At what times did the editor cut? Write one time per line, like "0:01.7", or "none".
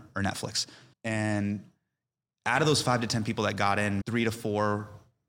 0:00.9
0:04.0

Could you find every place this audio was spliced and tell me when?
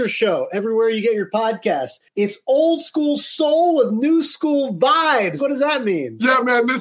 0:02.1
0:05.4

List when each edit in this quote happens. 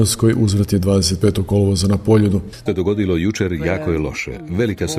0:02.7

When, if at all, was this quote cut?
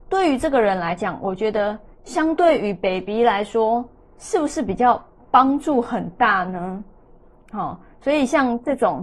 none

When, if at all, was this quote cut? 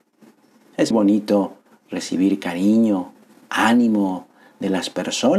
0:00.9

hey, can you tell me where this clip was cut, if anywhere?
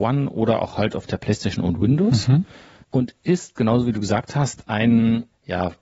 none

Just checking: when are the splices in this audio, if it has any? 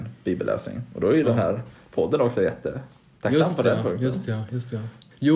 none

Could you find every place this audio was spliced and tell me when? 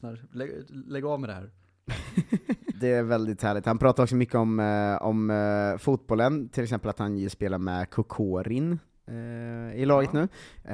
0:02.7

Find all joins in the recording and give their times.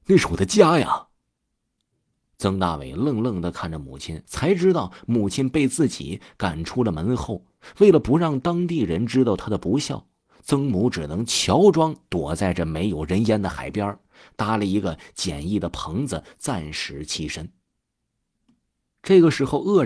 0:04.3

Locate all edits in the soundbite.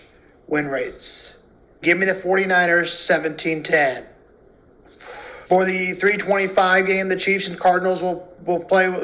0:01.8
0:05.4

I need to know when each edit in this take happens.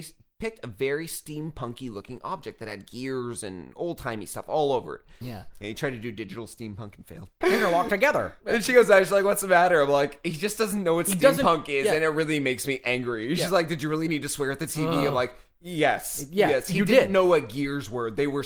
0:05.2
0:07.4

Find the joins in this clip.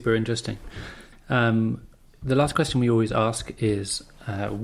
0:01.1

